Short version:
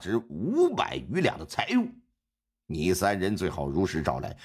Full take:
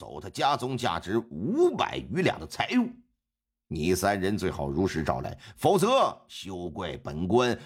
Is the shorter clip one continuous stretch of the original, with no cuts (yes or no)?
yes